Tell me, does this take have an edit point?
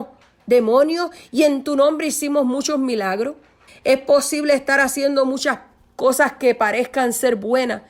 yes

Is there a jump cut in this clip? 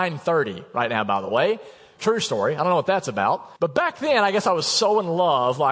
yes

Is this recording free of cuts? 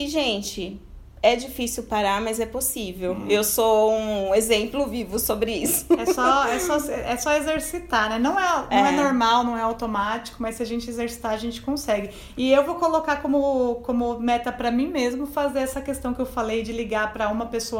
yes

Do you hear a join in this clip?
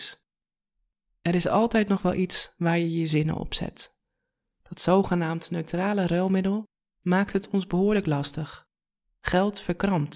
no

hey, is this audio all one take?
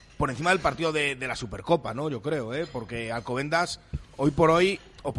yes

